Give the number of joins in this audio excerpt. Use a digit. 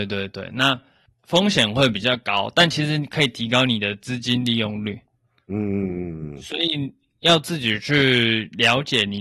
0